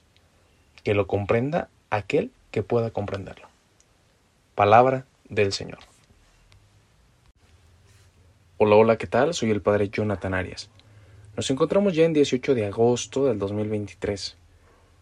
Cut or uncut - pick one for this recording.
uncut